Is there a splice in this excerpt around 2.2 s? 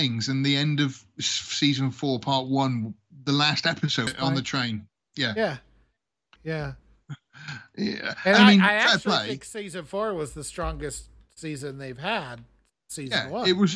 no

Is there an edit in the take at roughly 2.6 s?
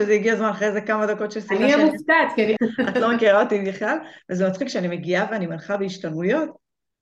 yes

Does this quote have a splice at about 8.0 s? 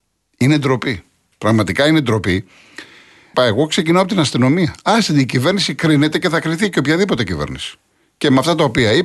no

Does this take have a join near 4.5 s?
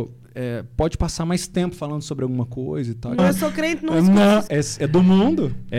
yes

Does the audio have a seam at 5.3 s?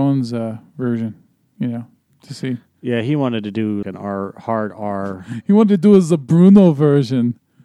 no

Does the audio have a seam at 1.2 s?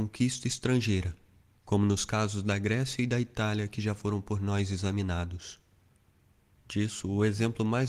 no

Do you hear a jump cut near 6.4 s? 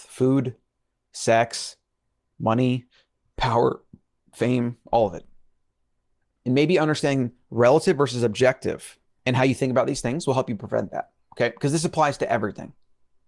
yes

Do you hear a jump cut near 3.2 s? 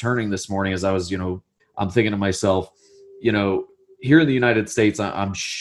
no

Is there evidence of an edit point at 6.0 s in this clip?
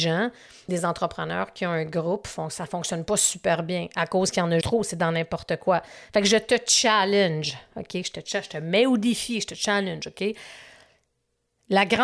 no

